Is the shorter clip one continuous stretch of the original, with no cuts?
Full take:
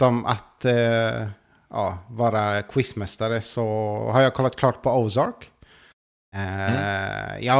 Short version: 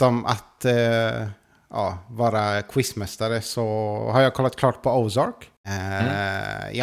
no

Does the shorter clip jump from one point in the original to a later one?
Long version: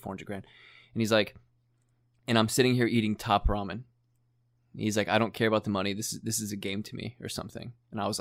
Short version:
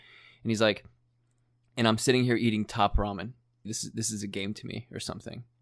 yes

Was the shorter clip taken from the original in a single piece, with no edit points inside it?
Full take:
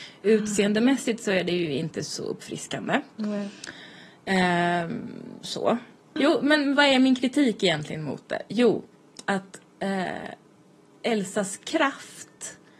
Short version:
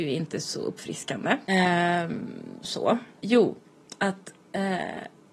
no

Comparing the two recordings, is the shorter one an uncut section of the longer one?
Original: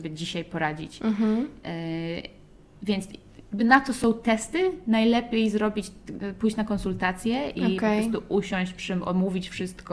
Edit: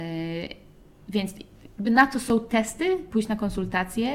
no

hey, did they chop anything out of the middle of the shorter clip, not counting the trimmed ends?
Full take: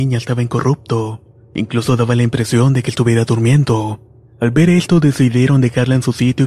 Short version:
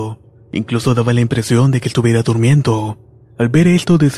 no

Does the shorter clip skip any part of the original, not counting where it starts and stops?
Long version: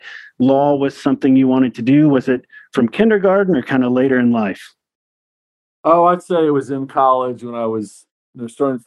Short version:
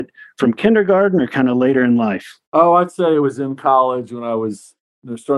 yes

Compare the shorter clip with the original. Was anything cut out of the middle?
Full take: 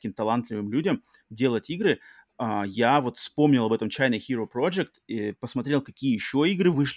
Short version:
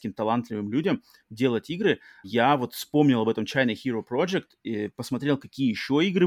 yes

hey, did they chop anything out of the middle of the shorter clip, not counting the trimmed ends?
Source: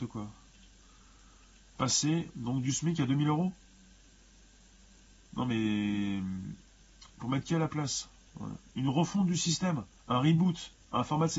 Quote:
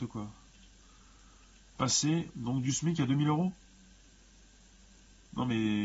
no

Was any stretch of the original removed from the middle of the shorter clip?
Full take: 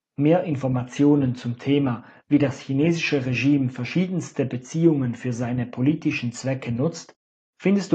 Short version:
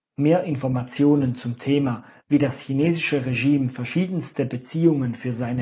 no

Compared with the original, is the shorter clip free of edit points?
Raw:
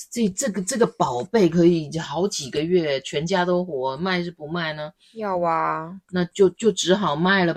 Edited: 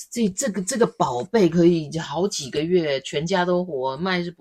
yes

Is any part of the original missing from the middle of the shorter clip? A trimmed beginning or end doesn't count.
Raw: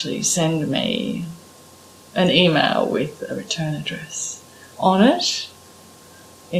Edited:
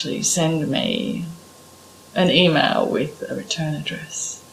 no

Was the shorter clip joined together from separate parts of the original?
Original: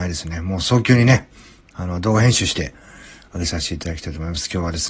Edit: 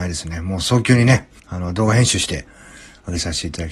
yes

